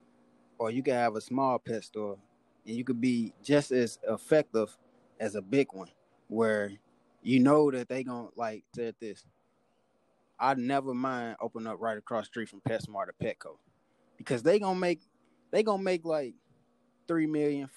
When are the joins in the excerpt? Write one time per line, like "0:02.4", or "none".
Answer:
0:08.7